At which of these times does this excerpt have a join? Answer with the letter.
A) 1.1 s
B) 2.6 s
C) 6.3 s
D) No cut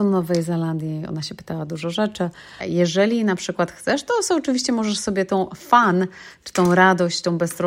B